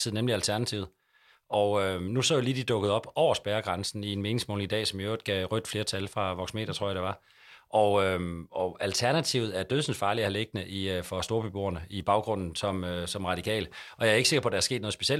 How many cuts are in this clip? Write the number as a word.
zero